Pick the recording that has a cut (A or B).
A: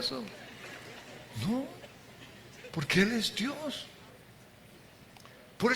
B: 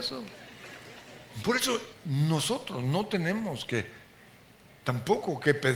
B